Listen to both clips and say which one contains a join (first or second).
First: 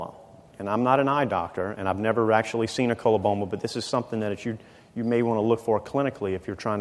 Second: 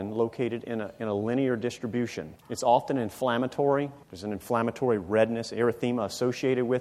second